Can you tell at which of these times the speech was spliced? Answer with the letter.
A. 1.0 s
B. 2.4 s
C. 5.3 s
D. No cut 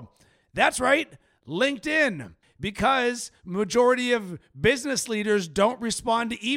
B